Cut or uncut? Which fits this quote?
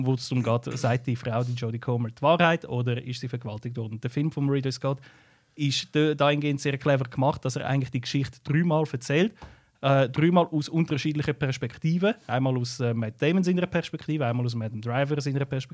uncut